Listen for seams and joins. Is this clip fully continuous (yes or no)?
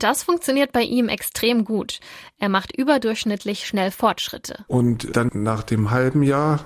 no